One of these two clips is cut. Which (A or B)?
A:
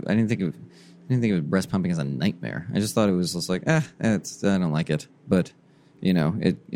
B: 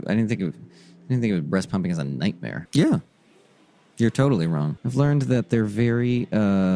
B